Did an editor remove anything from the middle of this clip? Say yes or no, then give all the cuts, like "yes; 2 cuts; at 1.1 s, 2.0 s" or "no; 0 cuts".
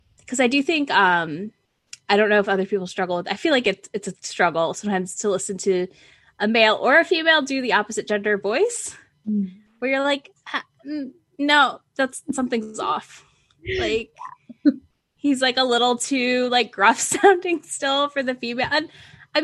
no; 0 cuts